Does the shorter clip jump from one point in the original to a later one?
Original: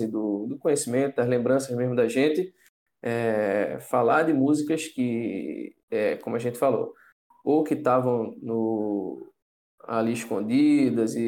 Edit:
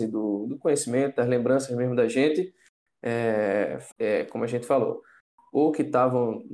yes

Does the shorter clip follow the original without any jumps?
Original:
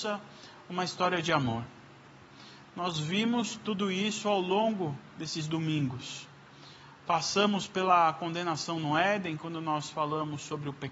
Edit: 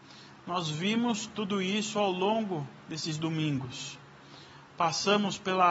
yes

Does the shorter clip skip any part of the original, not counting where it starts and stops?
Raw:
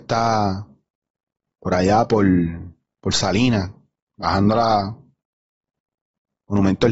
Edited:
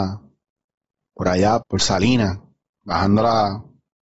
yes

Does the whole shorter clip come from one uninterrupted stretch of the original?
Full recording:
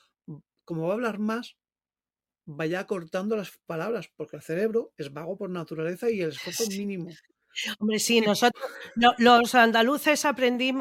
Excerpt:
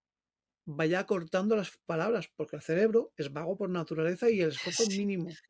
yes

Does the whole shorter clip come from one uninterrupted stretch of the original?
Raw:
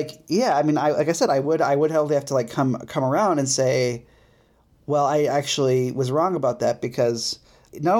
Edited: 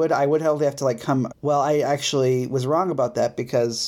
no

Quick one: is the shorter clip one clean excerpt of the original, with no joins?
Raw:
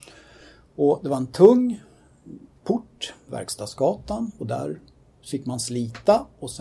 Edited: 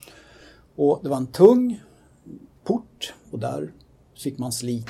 no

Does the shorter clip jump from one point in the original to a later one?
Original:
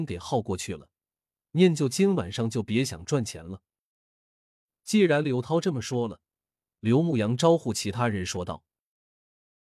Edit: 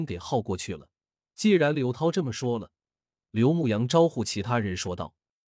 yes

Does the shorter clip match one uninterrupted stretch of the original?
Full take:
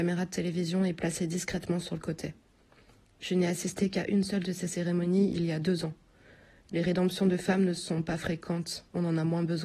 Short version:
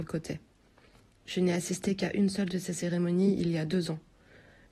yes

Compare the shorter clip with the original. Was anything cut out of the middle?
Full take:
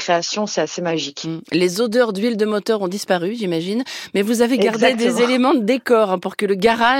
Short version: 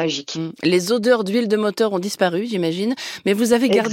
no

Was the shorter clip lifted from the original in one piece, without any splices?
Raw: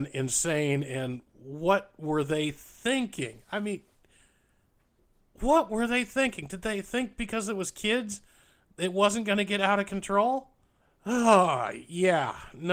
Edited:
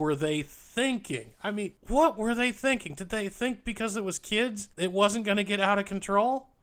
no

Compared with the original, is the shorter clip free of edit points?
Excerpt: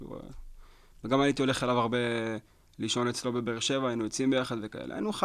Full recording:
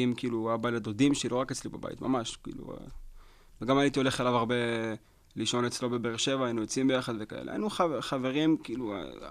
yes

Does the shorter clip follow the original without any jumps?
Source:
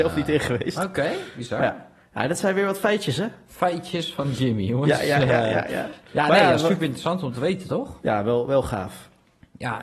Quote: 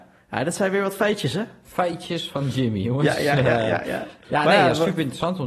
yes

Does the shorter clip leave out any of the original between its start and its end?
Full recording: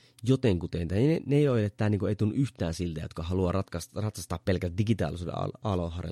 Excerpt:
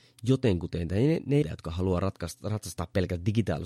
yes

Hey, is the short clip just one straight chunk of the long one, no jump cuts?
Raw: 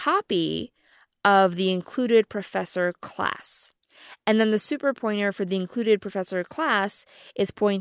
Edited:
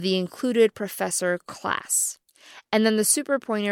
yes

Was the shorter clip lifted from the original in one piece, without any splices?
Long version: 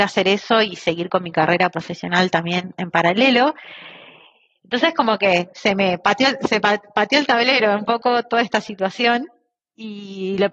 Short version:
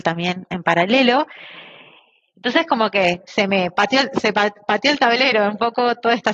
yes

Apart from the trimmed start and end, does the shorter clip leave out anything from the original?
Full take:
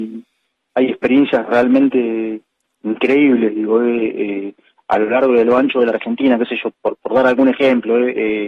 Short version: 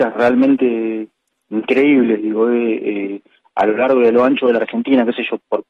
no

